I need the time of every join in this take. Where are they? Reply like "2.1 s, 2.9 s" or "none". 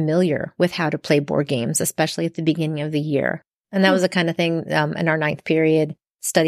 3.6 s